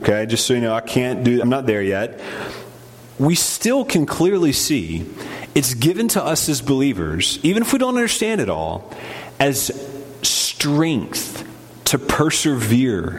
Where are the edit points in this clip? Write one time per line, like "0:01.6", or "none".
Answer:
0:01.4